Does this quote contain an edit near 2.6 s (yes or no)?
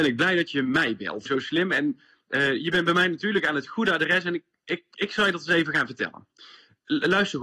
no